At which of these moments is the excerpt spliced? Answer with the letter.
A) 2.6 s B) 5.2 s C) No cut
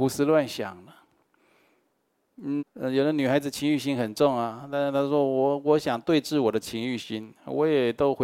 A